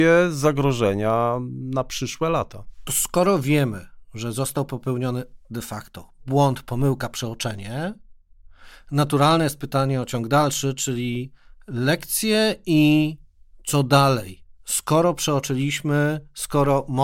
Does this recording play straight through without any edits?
yes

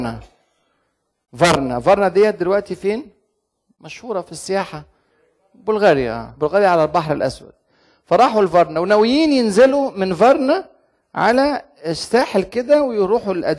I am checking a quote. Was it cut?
yes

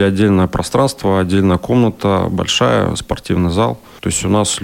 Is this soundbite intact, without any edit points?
yes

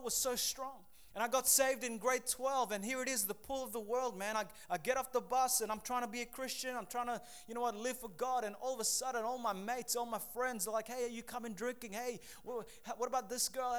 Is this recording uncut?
yes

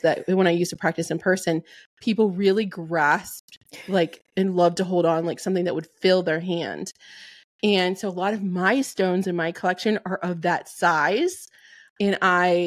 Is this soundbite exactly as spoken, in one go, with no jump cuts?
yes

